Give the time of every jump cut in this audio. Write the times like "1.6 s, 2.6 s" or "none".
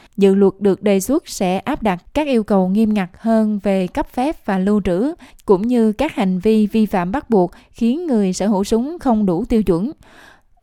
5.3 s